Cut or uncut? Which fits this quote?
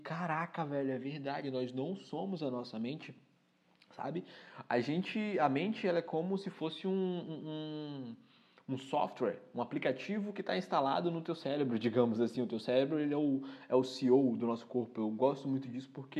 uncut